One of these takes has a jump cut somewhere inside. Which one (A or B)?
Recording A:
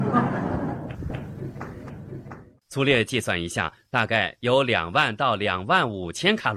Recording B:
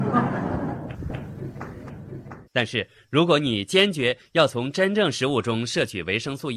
B